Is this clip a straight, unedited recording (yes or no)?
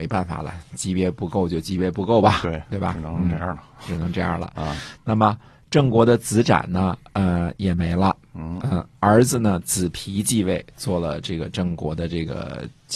yes